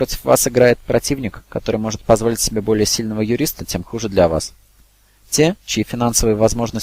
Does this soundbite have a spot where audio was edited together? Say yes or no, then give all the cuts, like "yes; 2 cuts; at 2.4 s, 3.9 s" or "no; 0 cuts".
no; 0 cuts